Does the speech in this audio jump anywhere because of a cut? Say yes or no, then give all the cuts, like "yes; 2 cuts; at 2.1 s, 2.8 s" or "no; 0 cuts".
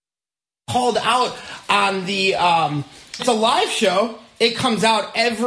yes; 1 cut; at 3.2 s